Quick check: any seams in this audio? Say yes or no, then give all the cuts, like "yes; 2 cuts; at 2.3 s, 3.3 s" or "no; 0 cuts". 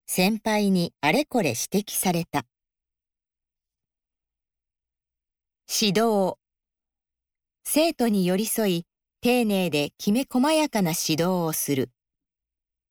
no; 0 cuts